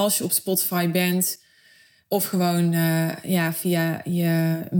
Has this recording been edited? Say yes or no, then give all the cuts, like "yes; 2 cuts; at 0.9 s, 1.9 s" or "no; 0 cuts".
no; 0 cuts